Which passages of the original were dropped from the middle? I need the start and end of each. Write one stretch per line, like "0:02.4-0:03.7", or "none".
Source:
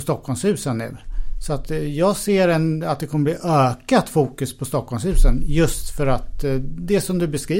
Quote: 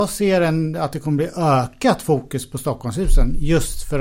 none